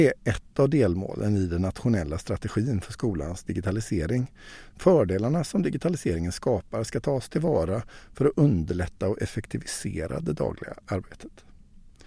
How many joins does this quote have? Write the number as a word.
one